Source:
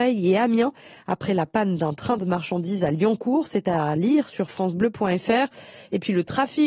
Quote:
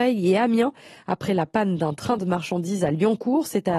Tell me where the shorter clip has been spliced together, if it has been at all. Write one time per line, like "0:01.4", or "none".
none